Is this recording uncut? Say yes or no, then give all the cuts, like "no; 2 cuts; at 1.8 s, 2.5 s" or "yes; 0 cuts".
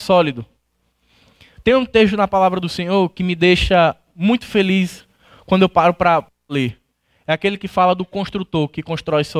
yes; 0 cuts